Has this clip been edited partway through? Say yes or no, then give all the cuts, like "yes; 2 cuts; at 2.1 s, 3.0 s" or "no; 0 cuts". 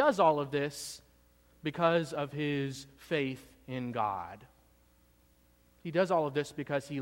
no; 0 cuts